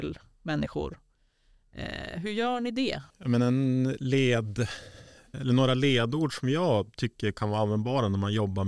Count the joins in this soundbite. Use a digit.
2